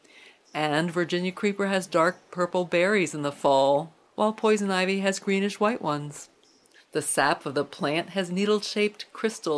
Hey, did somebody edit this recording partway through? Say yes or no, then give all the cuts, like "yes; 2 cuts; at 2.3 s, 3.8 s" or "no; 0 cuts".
yes; 1 cut; at 6.7 s